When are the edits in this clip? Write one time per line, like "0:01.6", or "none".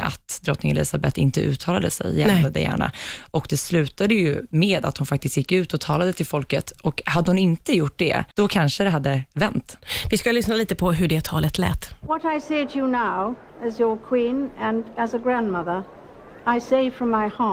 0:08.3